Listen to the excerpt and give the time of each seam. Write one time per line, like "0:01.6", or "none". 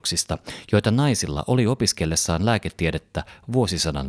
none

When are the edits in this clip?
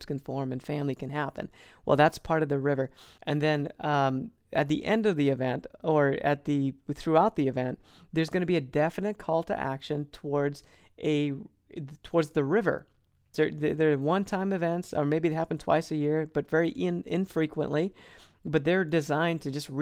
0:03.2
0:13.3

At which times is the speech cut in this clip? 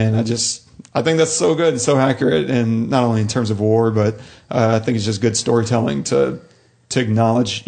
none

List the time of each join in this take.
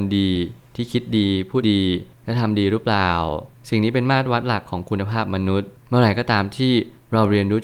0:01.6

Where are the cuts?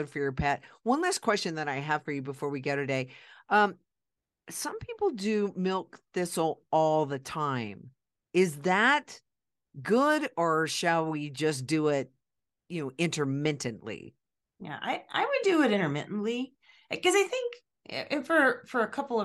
none

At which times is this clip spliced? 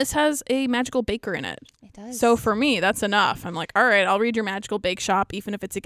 none

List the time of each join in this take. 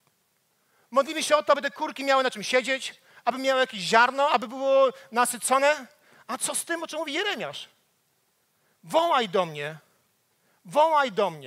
none

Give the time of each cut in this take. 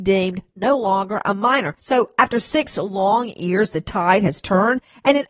0:01.8

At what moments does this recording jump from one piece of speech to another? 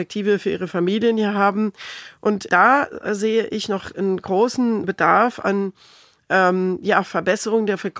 0:02.5
0:04.8

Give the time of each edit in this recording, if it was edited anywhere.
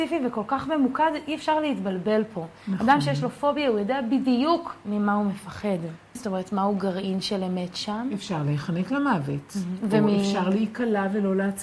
0:06.2

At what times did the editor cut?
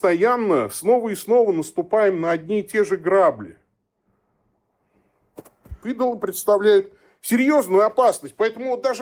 0:05.8

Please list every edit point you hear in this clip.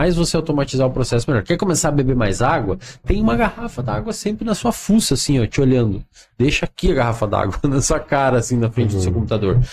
none

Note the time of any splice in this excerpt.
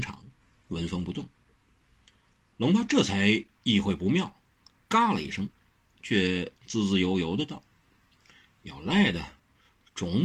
0:05.9

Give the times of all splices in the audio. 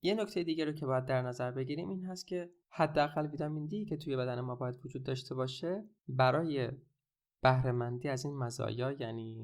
0:06.0

